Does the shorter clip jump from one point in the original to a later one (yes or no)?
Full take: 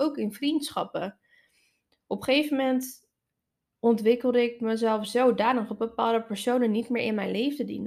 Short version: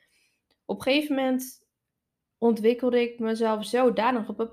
no